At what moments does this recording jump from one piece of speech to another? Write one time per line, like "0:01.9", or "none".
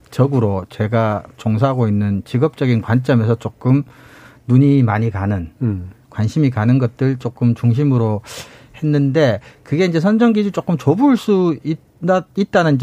none